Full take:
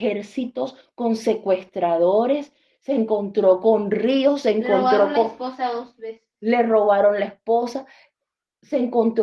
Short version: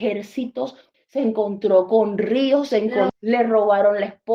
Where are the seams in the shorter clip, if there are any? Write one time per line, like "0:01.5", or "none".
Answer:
0:00.9
0:03.1